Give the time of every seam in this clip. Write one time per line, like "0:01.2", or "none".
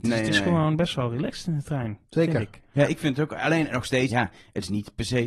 0:04.1